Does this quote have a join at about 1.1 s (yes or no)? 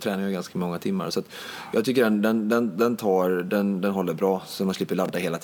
no